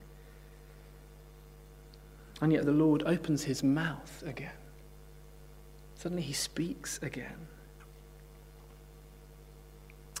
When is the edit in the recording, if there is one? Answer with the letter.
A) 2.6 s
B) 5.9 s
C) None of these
A